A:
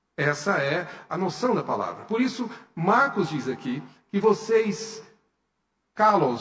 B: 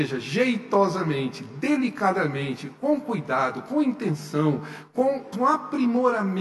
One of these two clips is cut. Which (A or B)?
B